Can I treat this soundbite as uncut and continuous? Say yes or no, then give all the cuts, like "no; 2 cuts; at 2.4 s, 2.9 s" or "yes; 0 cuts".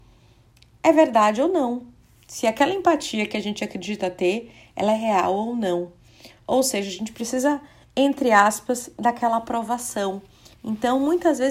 yes; 0 cuts